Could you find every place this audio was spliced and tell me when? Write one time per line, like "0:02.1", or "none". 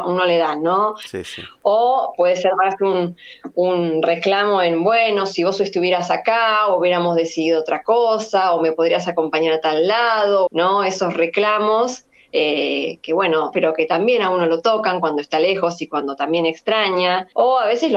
0:10.5
0:13.5